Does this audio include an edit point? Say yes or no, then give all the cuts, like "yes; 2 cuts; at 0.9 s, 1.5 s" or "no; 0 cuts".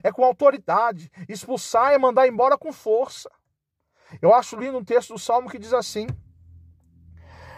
yes; 1 cut; at 4.2 s